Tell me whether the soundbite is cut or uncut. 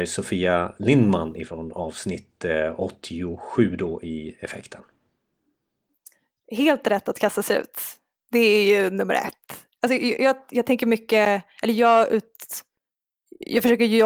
uncut